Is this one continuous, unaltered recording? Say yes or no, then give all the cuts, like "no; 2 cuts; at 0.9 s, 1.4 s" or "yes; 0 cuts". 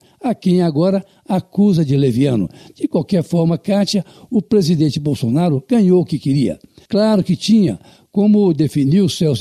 no; 1 cut; at 6.9 s